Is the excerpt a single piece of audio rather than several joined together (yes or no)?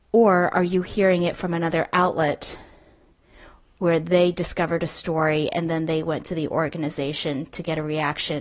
yes